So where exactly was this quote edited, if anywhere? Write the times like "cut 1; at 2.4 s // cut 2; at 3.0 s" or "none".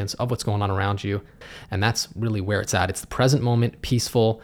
cut 1; at 1.6 s